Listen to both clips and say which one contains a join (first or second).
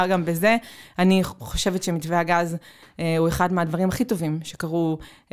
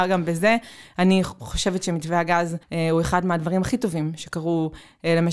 second